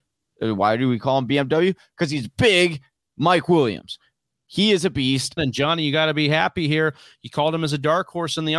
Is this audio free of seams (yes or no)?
no